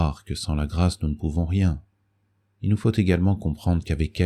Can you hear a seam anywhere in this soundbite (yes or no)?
no